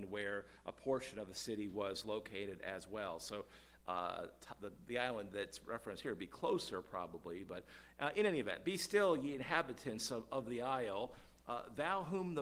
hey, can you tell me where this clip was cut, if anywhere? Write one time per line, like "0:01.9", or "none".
0:03.8

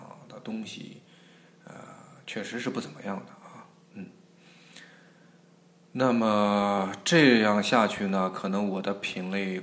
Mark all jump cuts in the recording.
none

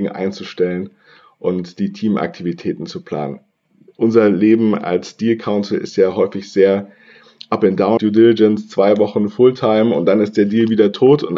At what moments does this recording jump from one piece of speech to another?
0:08.0

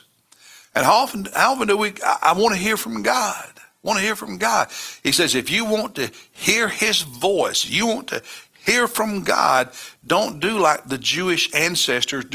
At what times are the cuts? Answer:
none

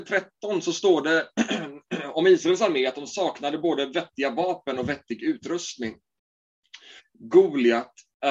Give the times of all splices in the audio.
0:07.0

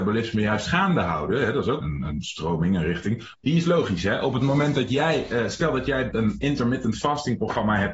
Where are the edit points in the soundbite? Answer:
0:01.8
0:03.3
0:06.1

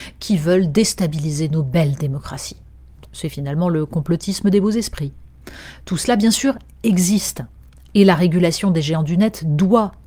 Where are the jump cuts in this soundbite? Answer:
none

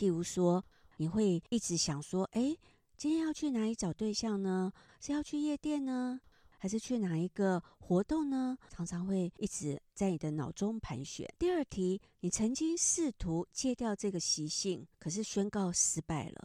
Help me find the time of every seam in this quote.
0:04.9
0:11.4
0:14.9

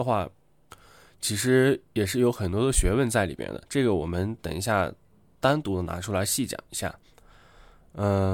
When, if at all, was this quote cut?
none

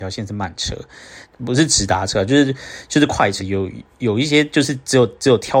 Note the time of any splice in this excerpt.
0:01.3
0:03.4

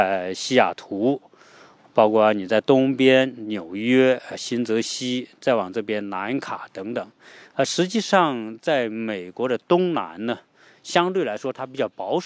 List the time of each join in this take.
none

